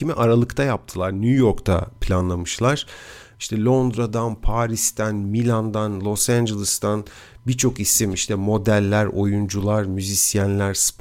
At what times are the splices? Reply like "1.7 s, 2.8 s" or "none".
none